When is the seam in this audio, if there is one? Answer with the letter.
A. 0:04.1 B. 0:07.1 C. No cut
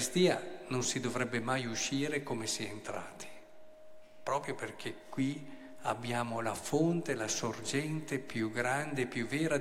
C